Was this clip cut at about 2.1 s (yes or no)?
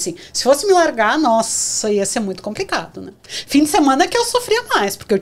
no